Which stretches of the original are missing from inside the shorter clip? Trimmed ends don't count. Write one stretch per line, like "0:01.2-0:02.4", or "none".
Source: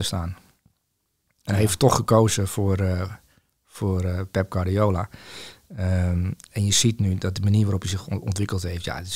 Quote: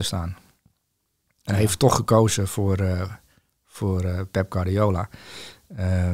none